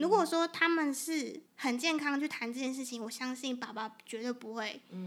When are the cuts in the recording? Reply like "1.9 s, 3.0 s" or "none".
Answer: 1.5 s